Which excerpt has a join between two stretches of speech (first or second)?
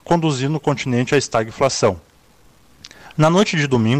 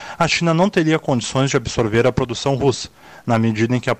first